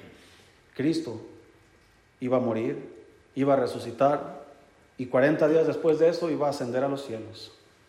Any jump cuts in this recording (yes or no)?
no